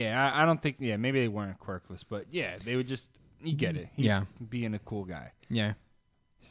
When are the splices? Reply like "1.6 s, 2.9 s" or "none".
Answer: none